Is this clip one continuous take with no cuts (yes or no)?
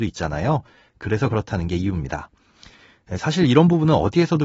yes